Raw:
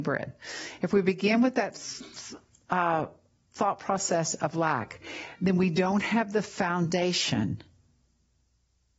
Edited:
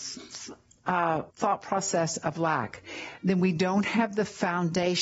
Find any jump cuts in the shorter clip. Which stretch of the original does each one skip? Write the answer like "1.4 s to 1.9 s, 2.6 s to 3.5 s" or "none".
3.1 s to 3.5 s